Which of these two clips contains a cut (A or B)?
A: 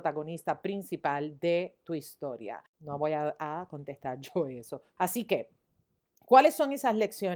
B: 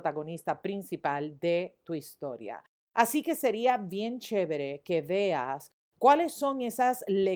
A